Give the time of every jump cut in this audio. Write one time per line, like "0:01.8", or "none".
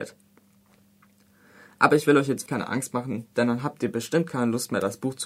0:02.5